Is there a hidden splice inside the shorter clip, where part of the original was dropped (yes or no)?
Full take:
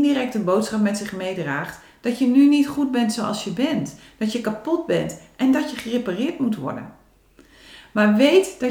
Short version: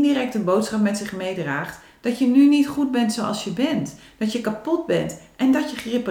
no